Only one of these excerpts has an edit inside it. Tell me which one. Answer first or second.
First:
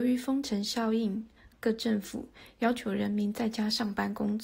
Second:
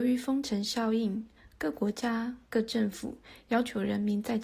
first